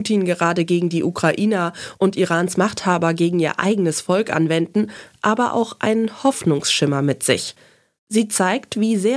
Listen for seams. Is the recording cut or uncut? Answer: uncut